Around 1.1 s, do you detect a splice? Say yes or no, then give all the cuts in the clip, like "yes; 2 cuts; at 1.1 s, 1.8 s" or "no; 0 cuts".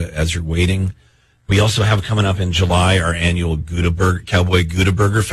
no; 0 cuts